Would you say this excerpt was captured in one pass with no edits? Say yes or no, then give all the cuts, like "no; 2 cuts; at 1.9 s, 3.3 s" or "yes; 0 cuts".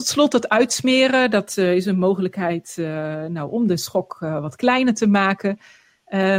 yes; 0 cuts